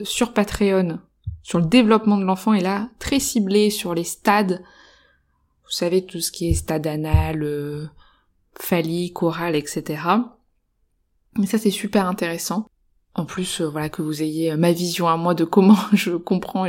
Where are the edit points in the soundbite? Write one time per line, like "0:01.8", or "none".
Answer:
none